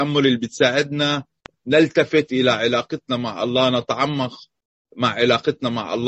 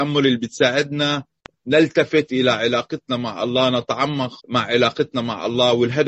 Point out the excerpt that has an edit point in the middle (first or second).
second